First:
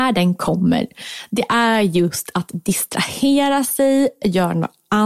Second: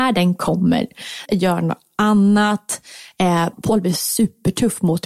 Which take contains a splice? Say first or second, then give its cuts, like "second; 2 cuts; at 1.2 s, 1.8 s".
second; 2 cuts; at 1.3 s, 3.5 s